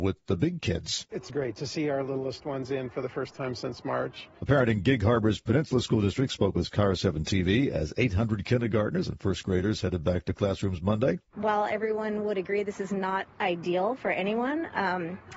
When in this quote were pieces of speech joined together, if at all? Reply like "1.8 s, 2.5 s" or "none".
1.3 s

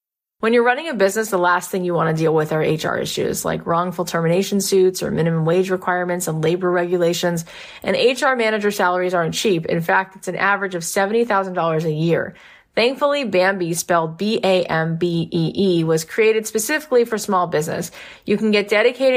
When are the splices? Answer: none

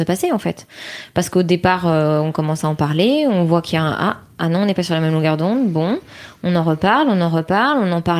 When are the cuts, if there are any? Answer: none

